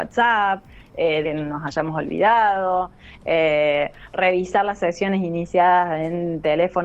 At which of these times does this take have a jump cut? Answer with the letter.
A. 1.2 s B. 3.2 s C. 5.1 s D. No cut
A